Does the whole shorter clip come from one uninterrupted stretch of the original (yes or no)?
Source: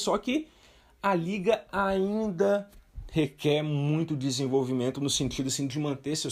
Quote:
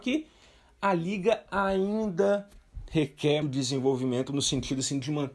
no